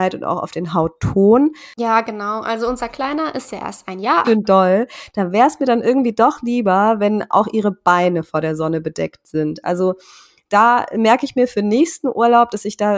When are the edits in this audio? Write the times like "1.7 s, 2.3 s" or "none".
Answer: 1.8 s, 4.2 s